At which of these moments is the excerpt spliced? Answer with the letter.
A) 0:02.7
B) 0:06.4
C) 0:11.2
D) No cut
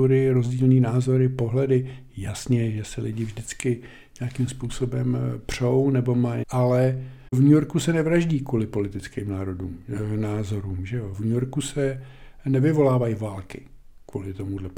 B